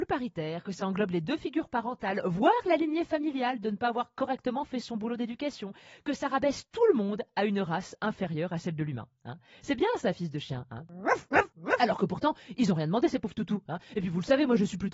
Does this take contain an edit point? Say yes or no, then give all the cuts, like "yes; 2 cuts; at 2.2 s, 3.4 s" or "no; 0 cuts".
no; 0 cuts